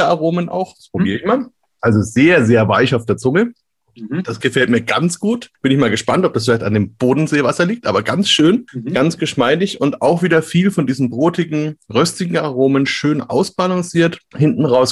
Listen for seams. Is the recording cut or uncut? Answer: uncut